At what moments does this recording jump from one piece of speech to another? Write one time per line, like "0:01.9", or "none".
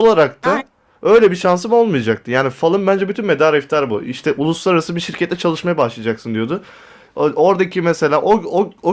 none